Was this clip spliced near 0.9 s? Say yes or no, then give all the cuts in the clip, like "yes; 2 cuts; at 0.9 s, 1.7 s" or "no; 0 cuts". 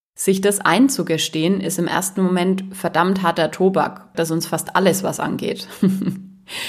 no; 1 cut; at 4.1 s